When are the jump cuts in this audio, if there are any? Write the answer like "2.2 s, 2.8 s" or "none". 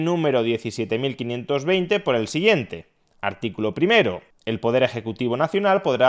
none